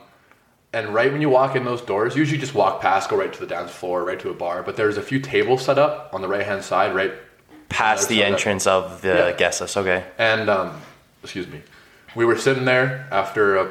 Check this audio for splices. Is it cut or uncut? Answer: uncut